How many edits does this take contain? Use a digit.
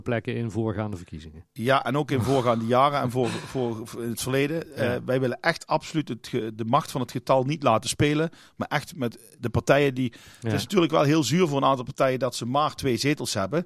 0